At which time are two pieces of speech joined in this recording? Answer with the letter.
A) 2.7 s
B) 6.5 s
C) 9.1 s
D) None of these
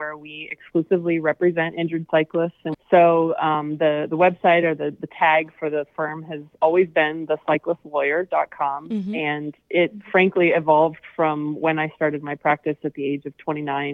A